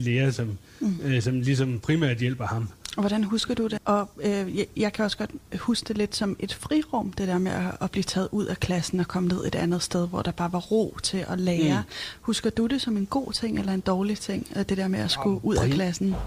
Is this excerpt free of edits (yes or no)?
no